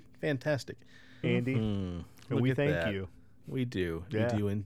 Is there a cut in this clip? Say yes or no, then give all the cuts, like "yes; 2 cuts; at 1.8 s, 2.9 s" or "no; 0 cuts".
yes; 1 cut; at 1.2 s